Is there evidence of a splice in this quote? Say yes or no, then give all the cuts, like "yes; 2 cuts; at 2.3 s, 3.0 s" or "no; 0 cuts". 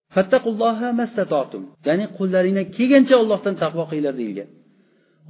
yes; 1 cut; at 1.7 s